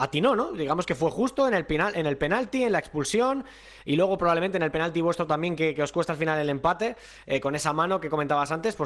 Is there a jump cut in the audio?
no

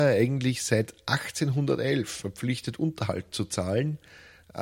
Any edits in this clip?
no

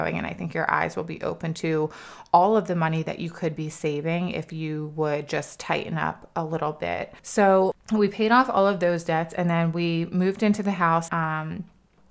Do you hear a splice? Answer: yes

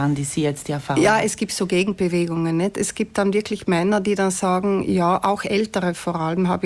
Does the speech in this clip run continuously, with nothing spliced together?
yes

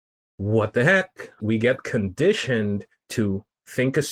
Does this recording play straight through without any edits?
no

